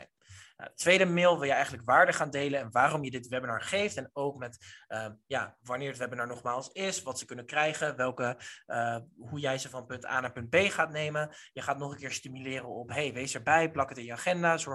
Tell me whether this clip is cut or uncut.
uncut